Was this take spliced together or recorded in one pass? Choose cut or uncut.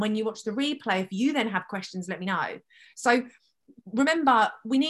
uncut